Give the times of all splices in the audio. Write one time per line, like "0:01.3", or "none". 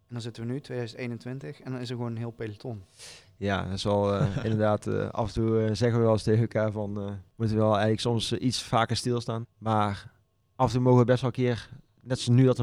0:07.3
0:09.4